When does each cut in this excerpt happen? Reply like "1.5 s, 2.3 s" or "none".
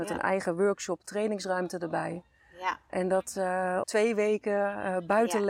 3.8 s